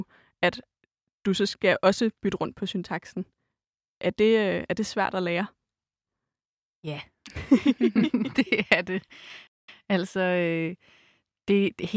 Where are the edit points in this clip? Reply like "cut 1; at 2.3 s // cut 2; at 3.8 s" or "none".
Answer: none